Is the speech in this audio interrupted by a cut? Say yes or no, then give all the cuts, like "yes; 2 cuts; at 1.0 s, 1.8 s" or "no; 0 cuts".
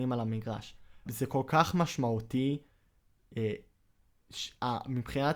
yes; 1 cut; at 1.1 s